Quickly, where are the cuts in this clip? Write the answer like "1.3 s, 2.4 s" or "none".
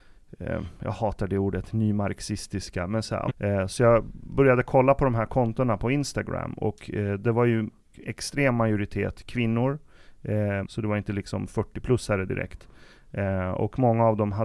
3.3 s, 10.6 s